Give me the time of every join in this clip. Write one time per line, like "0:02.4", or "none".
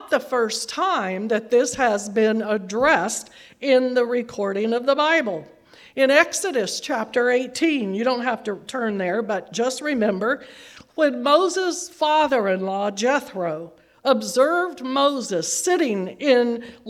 none